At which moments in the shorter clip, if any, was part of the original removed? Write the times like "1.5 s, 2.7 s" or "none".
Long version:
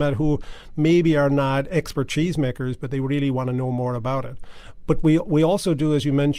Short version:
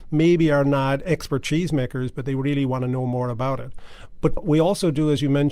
4.4 s